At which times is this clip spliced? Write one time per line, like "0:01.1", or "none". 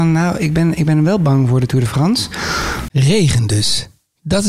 0:02.9